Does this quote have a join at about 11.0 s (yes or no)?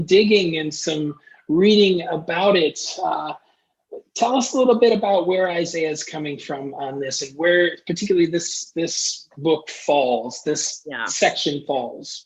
no